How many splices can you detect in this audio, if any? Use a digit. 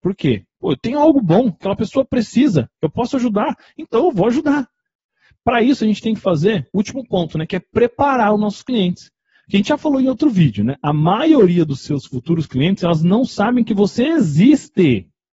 0